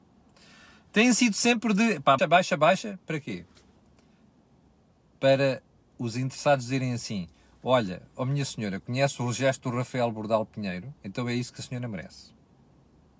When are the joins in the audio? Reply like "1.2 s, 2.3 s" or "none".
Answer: 2.2 s, 11.0 s